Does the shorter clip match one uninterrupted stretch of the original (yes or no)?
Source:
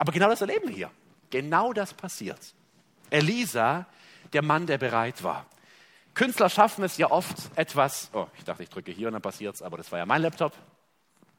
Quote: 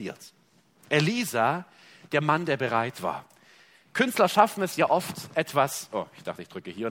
yes